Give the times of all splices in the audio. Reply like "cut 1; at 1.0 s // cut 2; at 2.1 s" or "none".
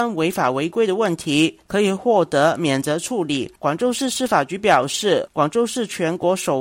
none